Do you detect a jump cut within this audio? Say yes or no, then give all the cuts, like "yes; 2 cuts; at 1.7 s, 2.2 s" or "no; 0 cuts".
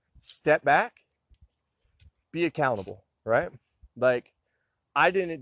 no; 0 cuts